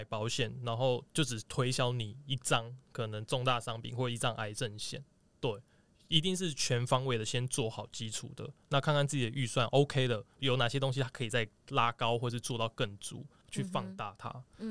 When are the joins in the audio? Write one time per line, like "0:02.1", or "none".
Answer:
0:10.4
0:13.4